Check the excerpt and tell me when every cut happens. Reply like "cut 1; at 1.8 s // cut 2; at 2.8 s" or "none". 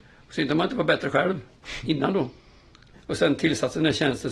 cut 1; at 2.9 s